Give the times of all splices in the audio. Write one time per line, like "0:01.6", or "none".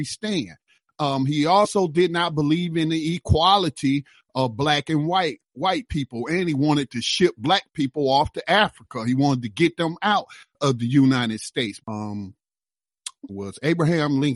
0:11.8
0:13.3

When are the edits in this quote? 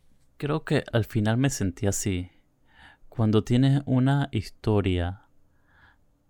0:00.9

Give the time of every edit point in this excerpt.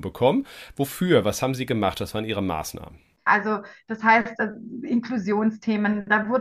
0:03.3

